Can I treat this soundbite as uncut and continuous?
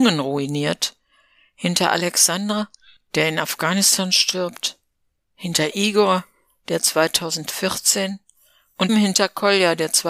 no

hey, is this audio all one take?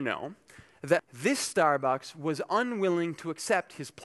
no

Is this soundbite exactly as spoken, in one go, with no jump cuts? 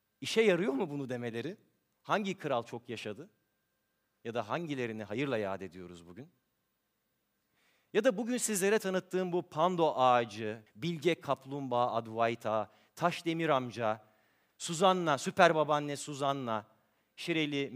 no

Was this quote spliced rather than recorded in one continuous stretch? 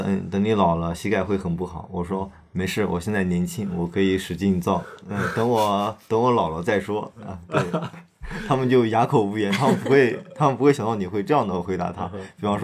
no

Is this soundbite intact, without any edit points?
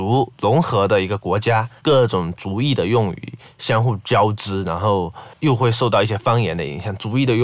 no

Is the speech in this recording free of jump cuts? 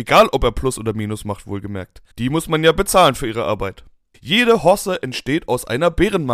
no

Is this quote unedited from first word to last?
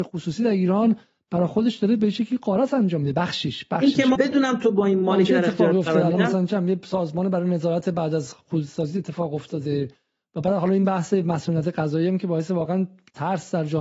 no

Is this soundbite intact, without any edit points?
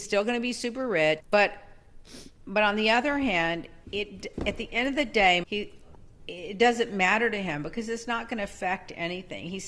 no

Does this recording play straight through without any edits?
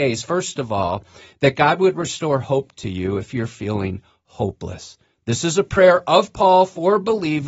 yes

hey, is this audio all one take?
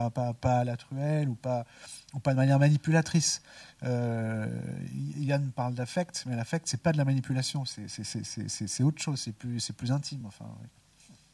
yes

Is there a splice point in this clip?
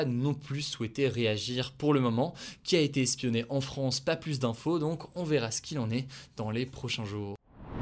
no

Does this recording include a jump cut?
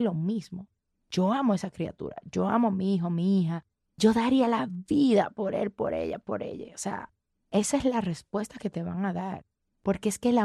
no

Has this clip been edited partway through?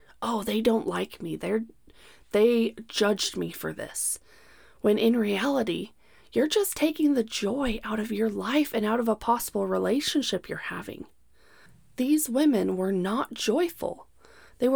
no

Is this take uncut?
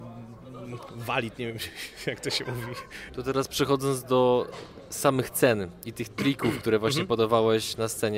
no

